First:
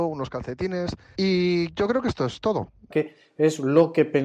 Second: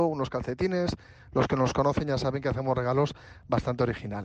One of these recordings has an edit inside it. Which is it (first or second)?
first